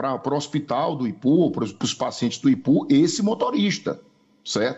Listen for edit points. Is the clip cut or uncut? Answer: uncut